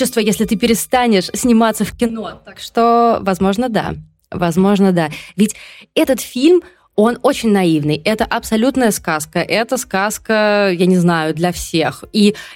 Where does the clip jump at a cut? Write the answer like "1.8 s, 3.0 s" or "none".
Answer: none

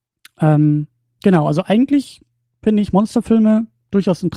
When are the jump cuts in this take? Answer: none

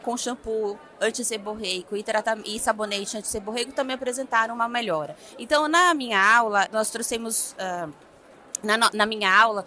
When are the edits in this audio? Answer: 5.3 s, 6.7 s

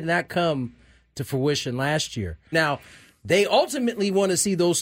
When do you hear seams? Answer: 2.5 s

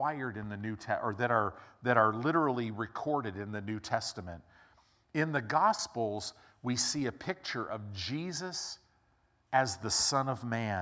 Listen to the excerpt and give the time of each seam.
none

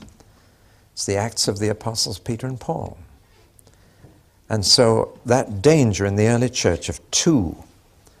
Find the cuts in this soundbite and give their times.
none

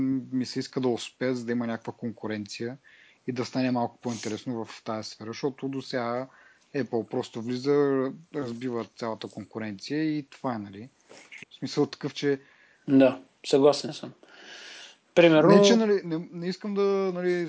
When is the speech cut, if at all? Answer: 11.4 s, 16.0 s

